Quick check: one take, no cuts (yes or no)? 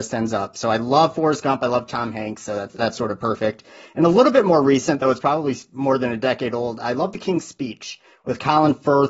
yes